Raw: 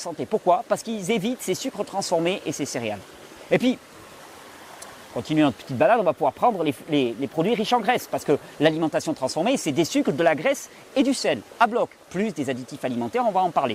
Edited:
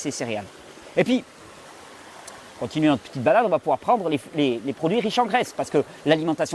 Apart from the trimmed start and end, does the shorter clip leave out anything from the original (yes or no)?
no